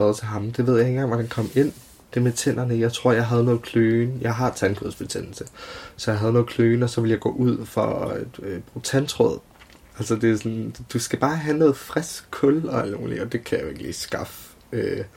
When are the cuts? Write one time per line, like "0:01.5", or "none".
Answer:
0:09.9